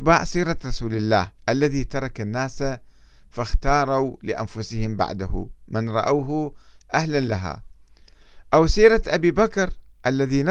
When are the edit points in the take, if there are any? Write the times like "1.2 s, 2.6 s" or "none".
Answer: 1.4 s